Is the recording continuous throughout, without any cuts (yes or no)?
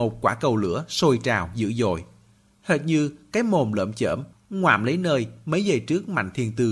no